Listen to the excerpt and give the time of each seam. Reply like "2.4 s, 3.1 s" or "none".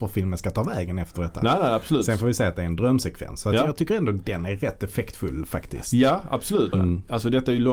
6.7 s

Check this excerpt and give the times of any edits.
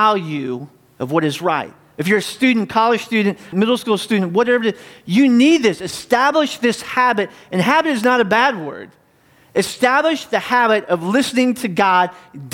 3.5 s

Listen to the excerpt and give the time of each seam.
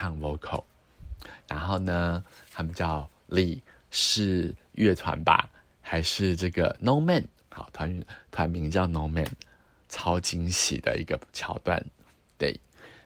none

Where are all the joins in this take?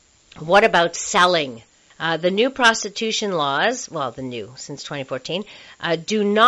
1.9 s

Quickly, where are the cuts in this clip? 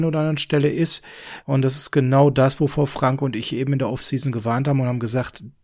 1.4 s

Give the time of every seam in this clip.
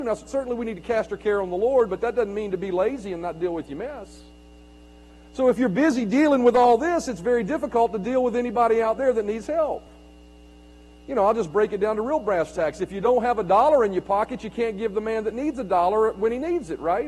none

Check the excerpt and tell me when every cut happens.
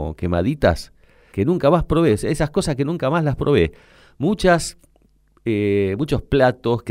1.3 s

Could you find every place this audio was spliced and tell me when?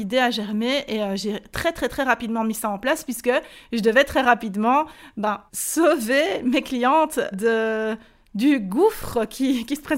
5.5 s, 7.3 s

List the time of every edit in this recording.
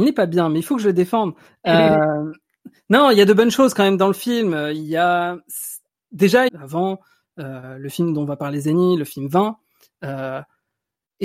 6.5 s

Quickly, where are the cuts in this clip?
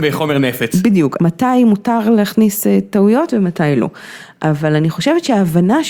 1.2 s

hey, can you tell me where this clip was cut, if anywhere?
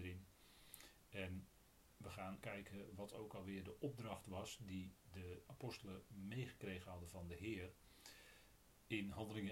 2.4 s

